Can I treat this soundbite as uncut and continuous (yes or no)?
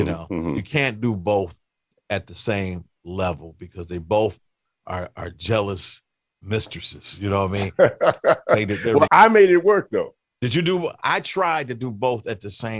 no